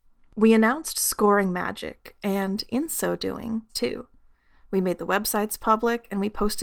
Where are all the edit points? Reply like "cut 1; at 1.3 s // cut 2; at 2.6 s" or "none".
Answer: cut 1; at 3.7 s